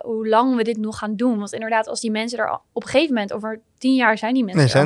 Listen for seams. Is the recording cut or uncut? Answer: uncut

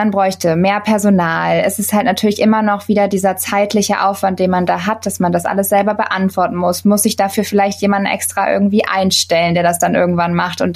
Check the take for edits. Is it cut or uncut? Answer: uncut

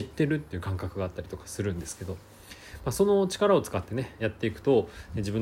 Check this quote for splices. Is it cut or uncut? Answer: cut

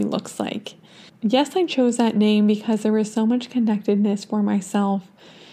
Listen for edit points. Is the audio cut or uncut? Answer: cut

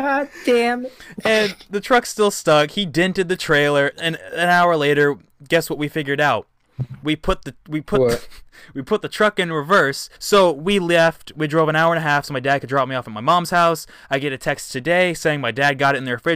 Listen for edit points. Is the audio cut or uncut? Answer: cut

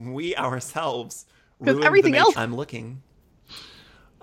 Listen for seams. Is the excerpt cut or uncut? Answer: cut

